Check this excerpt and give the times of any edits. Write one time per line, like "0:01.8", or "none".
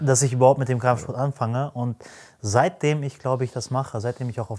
none